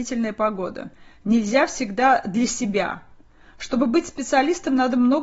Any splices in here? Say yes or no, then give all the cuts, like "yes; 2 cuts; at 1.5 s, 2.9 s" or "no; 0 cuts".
no; 0 cuts